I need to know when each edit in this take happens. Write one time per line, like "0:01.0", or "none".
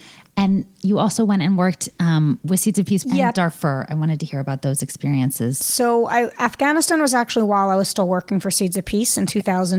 0:03.0